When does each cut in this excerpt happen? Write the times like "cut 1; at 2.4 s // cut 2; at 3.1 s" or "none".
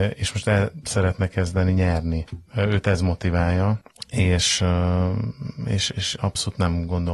none

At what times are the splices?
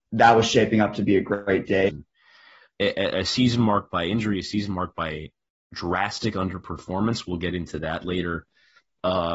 cut 1; at 1.9 s

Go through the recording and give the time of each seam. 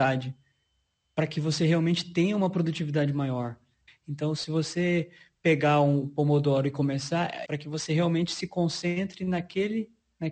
cut 1; at 3.9 s // cut 2; at 7.5 s

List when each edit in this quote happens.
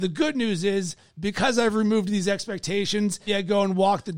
cut 1; at 3.3 s

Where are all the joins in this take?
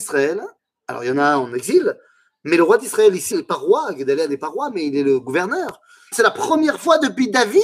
cut 1; at 3.3 s // cut 2; at 6.1 s

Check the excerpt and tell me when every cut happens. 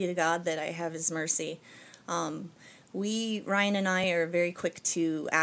none

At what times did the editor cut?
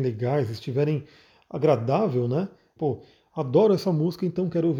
cut 1; at 2.8 s

